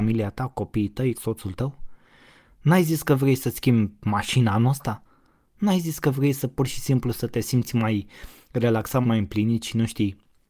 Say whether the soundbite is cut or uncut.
cut